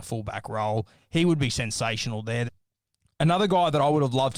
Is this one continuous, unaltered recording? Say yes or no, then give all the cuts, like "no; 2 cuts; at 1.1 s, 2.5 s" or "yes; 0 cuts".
no; 1 cut; at 2.5 s